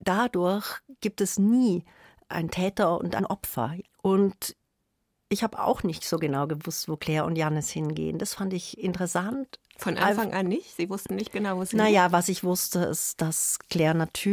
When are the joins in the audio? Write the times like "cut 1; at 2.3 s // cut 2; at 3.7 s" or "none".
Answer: cut 1; at 3.9 s